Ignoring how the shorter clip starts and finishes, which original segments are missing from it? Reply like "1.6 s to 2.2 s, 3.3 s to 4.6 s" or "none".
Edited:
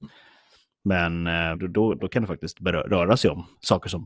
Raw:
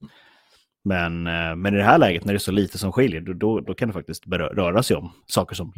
1.6 s to 3.2 s